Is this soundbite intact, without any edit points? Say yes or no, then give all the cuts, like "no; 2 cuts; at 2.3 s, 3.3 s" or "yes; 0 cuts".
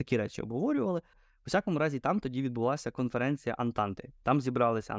no; 1 cut; at 1.1 s